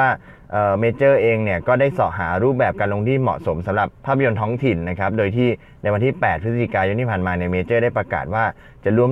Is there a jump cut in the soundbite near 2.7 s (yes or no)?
no